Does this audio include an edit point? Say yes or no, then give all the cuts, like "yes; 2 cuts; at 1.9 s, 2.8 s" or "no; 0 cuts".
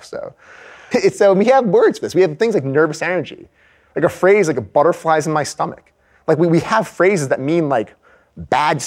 yes; 1 cut; at 0.9 s